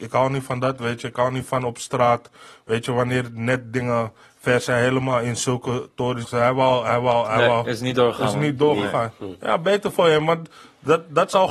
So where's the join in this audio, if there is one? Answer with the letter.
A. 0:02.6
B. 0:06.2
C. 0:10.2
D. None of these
B